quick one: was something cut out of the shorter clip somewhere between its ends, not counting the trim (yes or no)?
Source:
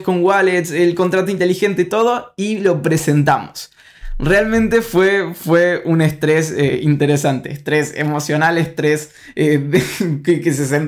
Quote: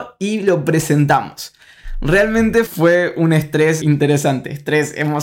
yes